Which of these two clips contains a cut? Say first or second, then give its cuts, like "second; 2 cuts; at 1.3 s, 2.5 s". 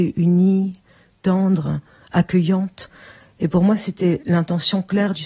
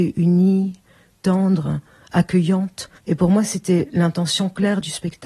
second; 1 cut; at 3.0 s